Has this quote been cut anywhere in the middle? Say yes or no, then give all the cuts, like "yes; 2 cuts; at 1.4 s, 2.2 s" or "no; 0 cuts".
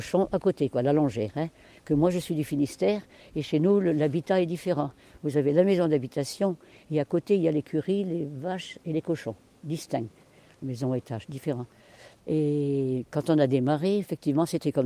no; 0 cuts